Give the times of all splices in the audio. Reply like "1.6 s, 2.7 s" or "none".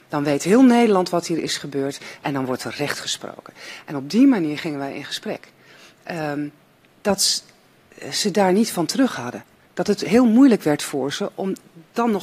6.9 s